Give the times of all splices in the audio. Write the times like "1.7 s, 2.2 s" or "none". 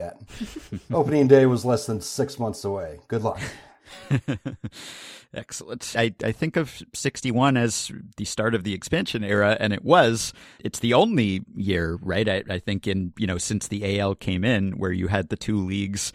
5.9 s, 10.6 s